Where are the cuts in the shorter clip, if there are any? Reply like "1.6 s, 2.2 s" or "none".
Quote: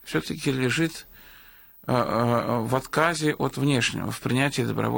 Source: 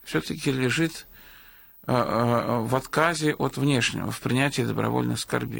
none